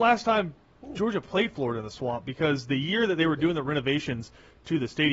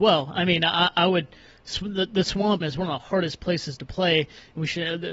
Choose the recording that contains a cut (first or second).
second